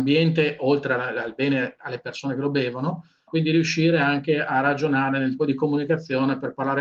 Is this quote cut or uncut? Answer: cut